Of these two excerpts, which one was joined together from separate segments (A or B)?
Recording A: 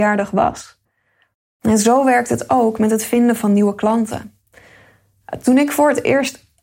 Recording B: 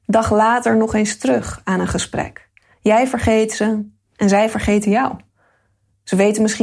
B